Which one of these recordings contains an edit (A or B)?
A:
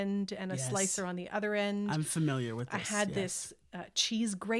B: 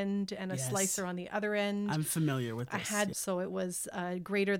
B